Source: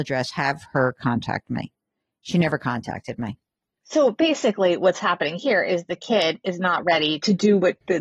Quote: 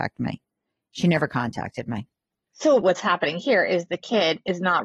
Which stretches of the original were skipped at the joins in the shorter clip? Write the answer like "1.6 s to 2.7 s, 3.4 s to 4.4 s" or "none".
4.1 s to 4.8 s